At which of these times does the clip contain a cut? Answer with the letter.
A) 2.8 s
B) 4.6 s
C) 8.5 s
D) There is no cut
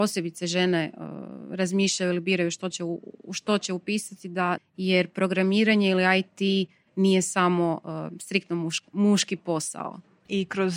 B